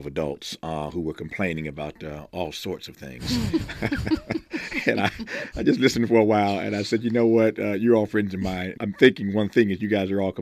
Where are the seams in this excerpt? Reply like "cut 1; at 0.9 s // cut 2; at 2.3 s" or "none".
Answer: cut 1; at 8.8 s